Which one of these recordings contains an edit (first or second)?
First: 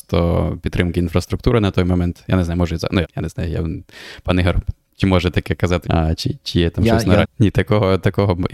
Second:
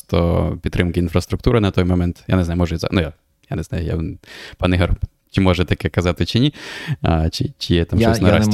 first